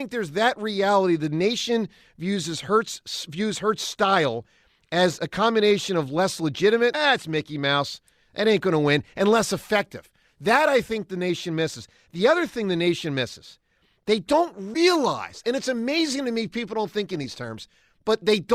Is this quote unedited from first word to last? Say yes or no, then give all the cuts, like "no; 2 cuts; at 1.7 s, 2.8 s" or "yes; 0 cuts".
yes; 0 cuts